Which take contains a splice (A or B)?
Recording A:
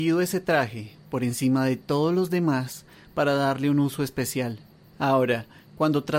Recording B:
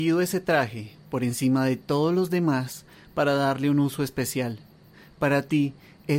A